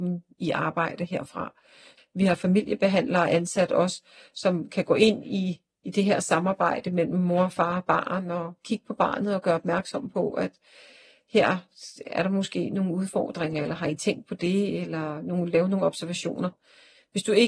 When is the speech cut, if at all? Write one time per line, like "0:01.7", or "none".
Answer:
0:02.0